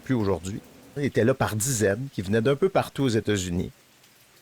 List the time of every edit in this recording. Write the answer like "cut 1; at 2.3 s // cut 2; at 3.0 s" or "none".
cut 1; at 1.0 s